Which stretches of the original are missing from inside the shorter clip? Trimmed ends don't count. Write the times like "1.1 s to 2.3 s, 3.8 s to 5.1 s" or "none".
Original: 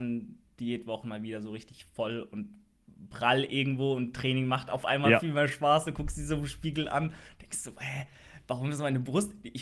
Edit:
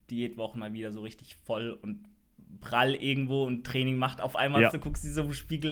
5.2 s to 5.8 s